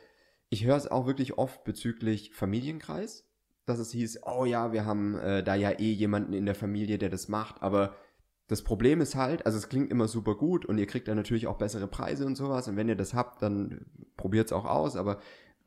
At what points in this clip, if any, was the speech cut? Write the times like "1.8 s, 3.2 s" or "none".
none

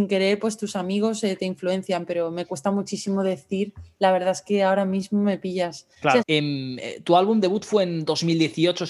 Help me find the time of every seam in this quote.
6.2 s

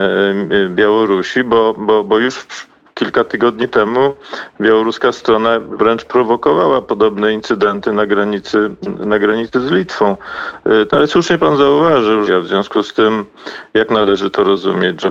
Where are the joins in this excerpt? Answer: 10.9 s, 12.3 s

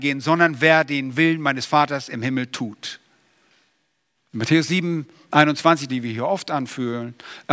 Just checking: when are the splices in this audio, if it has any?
4.1 s, 5.9 s

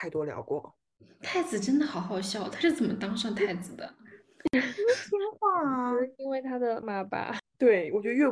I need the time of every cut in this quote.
6.8 s

